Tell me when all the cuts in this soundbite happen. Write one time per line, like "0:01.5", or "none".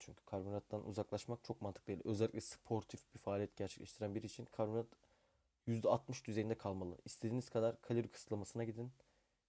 none

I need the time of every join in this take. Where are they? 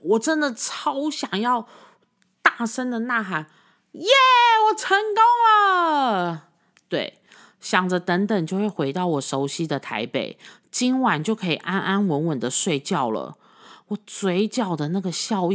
none

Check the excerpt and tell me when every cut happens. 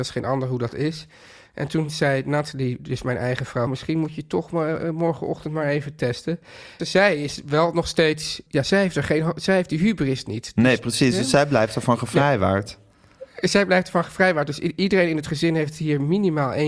0:03.7
0:06.8
0:08.5

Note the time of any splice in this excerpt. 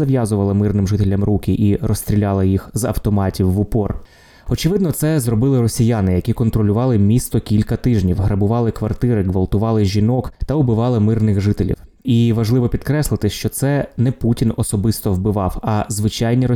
none

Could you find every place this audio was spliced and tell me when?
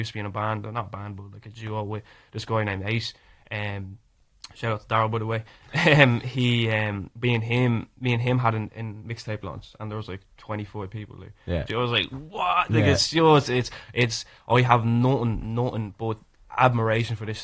0:11.7

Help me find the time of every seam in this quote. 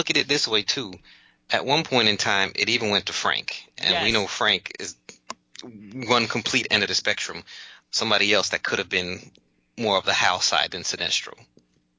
0:07.8

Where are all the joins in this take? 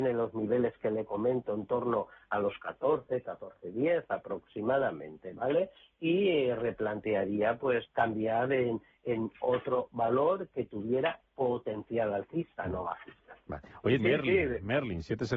0:07.8
0:14.0

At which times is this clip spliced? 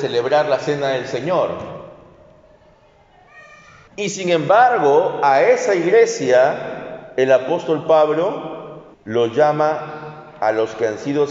0:03.9
0:08.9

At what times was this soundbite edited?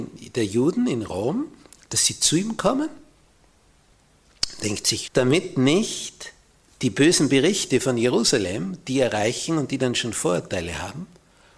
0:05.1

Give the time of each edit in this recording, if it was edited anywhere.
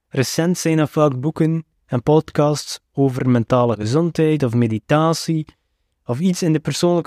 none

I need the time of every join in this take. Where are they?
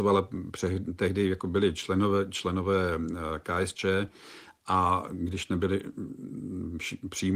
none

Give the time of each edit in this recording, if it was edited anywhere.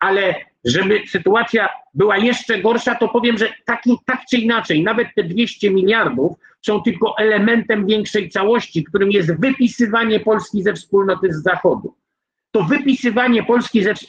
none

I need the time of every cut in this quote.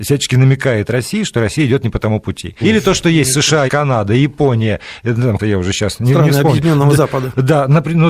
0:02.6
0:03.7
0:05.4

